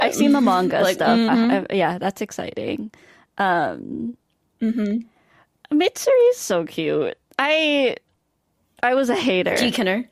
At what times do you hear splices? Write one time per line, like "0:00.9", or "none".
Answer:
0:01.3